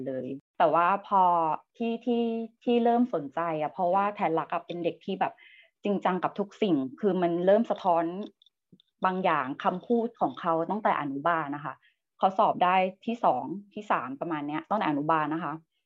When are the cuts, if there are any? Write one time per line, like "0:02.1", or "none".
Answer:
none